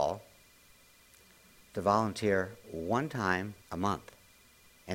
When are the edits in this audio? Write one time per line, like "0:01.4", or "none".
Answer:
0:03.6

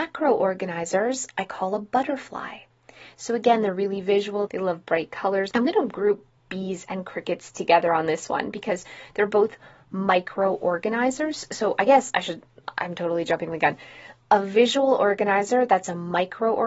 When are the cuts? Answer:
0:04.5
0:05.5

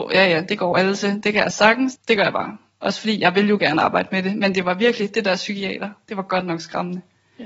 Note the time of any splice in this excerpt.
0:02.0

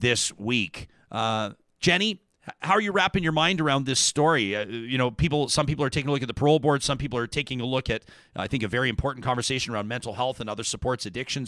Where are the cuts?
none

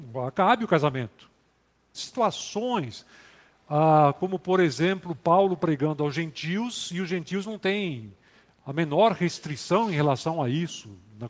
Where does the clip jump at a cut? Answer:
0:01.9

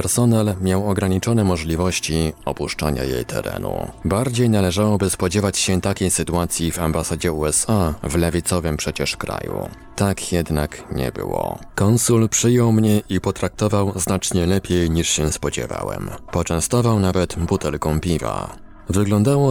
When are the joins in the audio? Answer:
0:11.7

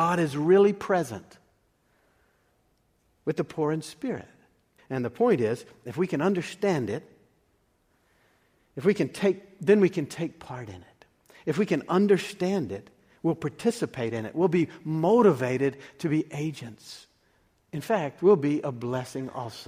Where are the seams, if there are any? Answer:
0:04.8

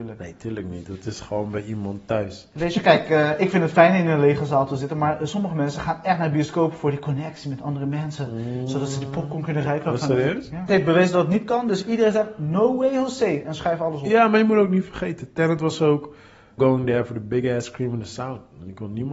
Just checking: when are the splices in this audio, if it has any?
0:10.7
0:16.6

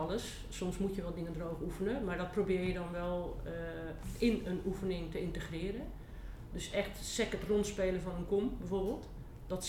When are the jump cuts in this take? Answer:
none

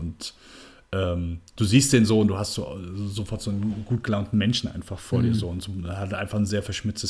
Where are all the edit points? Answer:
none

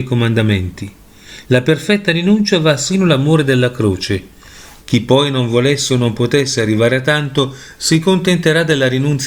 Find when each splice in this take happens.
0:01.4
0:04.8

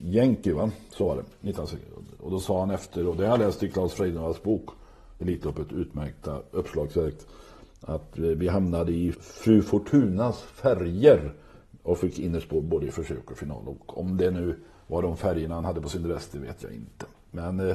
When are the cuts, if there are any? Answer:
0:09.1

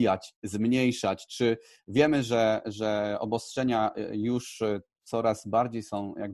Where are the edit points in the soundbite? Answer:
none

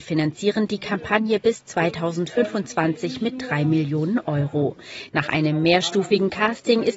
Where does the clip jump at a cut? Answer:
0:05.1

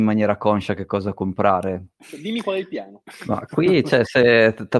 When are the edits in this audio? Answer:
0:01.9

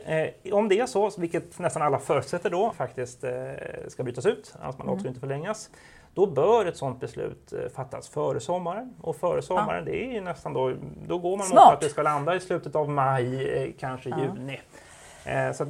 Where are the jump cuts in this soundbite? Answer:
0:02.7

